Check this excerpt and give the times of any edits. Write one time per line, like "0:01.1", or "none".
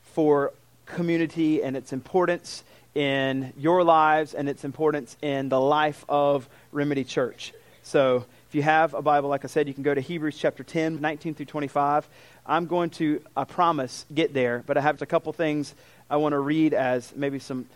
0:11.0
0:15.0

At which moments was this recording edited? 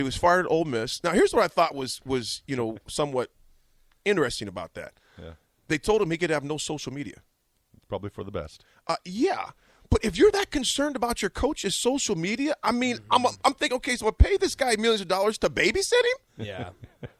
none

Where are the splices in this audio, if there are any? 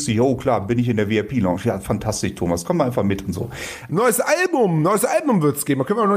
0:03.9

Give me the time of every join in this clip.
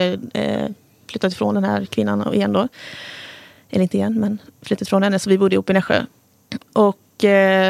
none

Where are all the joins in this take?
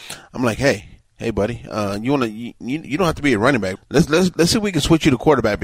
0:03.8

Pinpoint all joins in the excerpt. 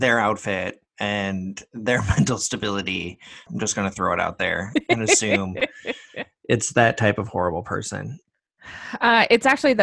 0:03.5

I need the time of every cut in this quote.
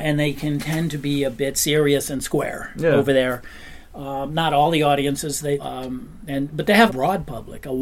0:05.6
0:06.9

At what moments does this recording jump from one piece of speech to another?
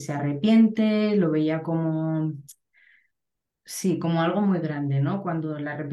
none

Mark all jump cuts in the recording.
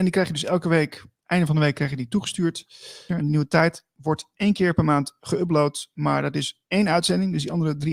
0:03.1

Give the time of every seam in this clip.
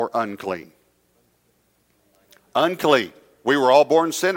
none

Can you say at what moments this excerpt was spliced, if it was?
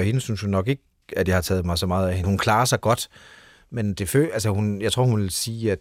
0:02.2

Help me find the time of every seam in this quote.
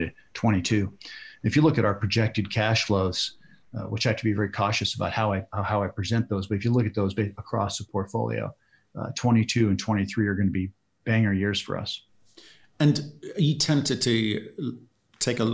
none

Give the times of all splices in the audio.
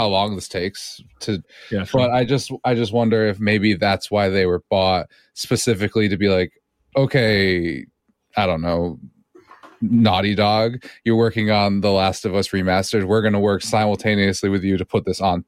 0:01.4

